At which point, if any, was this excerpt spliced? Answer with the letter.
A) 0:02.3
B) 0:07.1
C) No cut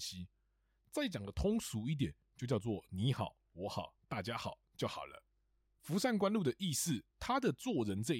B